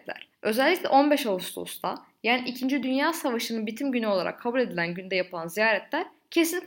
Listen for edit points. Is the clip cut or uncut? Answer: uncut